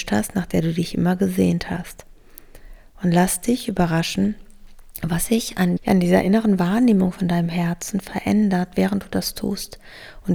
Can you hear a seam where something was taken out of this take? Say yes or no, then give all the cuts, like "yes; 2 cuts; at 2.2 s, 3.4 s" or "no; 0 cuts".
yes; 1 cut; at 5.8 s